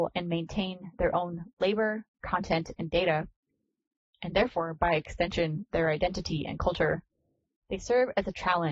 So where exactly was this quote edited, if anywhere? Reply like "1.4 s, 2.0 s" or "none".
2.2 s